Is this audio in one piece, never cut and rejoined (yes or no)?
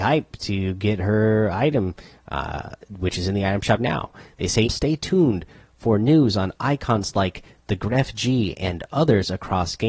no